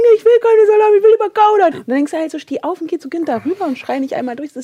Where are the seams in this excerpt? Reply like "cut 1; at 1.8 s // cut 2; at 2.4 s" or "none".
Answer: cut 1; at 1.7 s